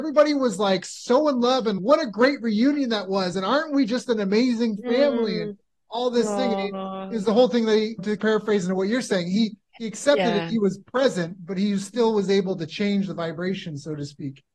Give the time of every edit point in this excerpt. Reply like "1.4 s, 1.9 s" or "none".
none